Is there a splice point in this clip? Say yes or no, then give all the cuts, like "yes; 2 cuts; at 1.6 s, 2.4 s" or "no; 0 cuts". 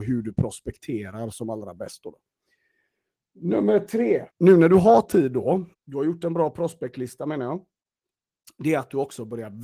yes; 2 cuts; at 4.3 s, 5.7 s